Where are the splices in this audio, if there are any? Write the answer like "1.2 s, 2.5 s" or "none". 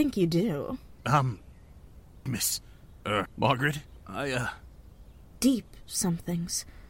2.3 s, 3.3 s, 5.3 s